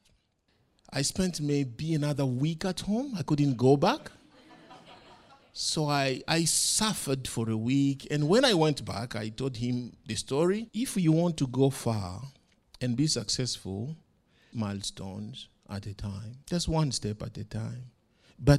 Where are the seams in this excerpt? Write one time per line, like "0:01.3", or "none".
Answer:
0:10.7
0:14.5
0:16.4

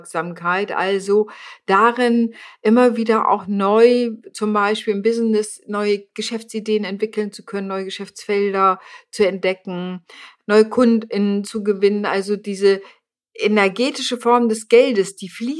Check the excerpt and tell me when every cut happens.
none

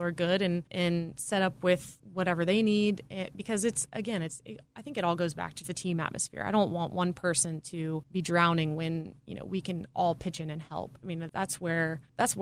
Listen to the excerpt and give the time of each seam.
0:05.6
0:11.3

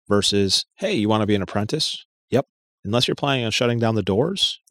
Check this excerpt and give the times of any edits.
0:02.8

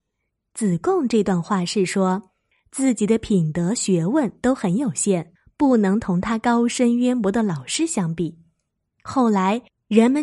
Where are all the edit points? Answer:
none

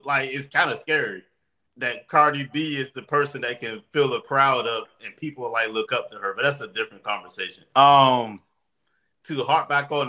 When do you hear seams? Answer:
0:07.7

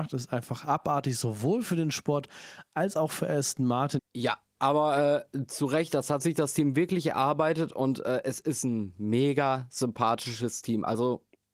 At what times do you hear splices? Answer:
0:04.0

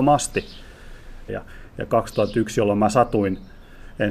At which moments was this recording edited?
0:01.3

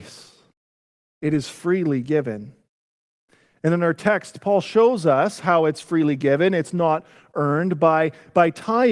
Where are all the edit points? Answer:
none

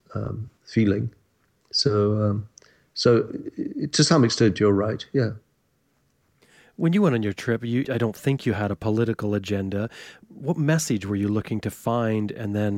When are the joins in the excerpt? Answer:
0:07.8

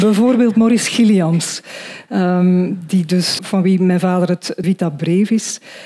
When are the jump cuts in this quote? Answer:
0:03.4
0:04.6

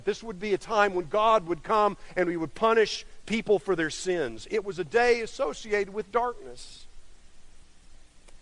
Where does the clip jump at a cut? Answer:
none

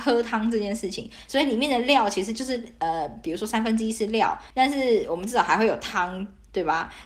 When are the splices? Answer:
0:01.3
0:04.5

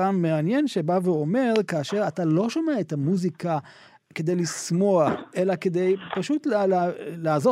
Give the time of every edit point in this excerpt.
none

